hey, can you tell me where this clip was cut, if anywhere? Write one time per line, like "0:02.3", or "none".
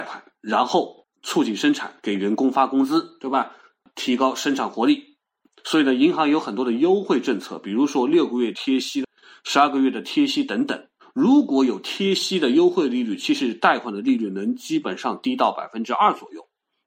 none